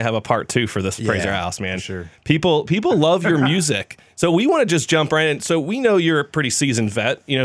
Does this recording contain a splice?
no; 0 cuts

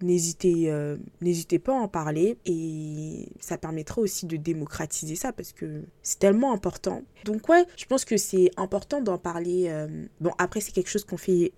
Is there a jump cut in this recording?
yes; 1 cut; at 7.2 s

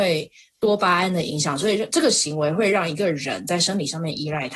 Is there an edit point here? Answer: no; 0 cuts

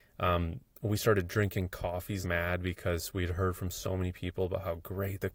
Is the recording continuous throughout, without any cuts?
no; 1 cut; at 2.2 s

